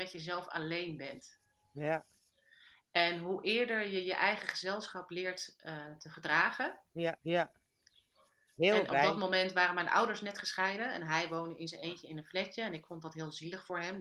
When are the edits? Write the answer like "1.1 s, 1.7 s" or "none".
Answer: 7.2 s